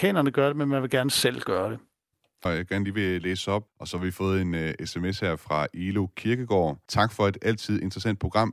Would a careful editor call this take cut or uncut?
cut